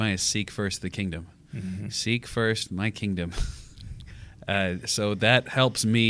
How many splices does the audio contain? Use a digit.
0